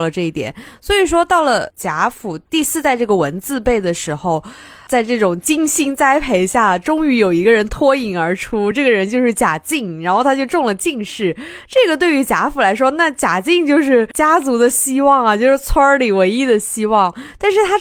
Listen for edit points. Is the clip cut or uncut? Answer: uncut